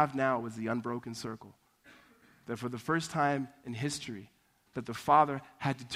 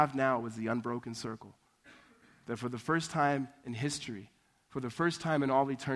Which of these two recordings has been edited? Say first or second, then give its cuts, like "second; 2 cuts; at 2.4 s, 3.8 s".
first; 1 cut; at 4.7 s